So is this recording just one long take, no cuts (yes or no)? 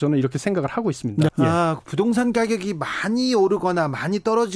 no